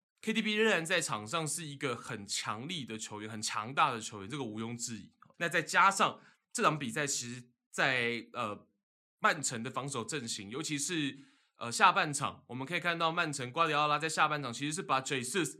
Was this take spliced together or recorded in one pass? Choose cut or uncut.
cut